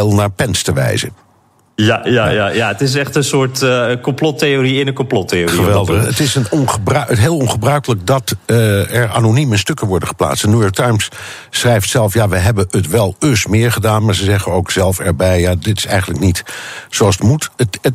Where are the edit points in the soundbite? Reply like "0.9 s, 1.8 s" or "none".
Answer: none